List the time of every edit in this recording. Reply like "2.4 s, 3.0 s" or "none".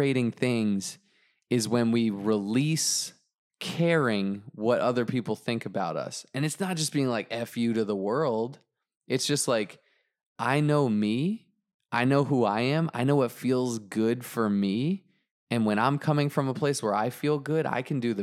none